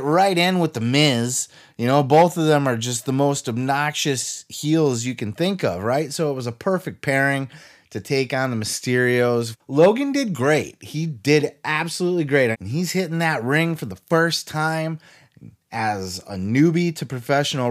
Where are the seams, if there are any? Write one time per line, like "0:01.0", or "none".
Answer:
0:09.5
0:12.5